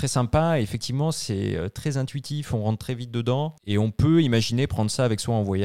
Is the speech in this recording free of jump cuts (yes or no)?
no